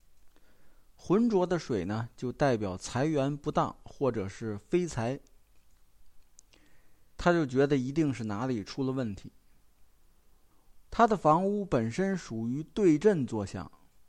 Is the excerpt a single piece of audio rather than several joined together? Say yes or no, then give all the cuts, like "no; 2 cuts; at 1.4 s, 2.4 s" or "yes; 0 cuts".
no; 2 cuts; at 7.2 s, 10.9 s